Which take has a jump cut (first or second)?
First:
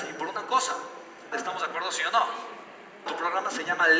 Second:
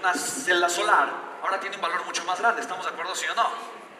first